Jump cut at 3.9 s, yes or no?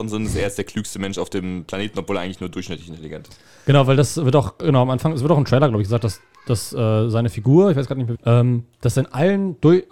no